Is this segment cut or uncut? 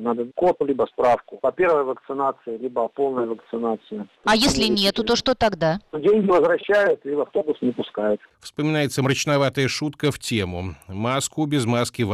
uncut